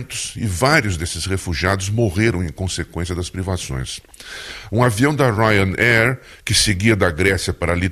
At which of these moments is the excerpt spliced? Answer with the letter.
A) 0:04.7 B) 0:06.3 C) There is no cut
A